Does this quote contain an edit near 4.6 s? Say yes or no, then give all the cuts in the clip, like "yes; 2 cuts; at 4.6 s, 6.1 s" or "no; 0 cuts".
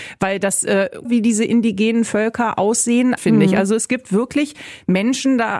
no; 2 cuts; at 1.0 s, 3.2 s